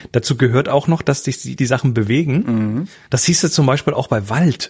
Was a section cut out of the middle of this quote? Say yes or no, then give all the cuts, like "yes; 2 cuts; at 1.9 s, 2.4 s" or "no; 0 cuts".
yes; 2 cuts; at 1.6 s, 3.1 s